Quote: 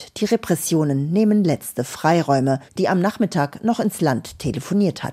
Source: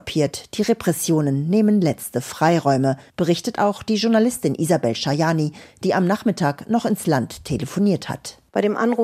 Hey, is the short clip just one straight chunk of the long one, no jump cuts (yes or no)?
no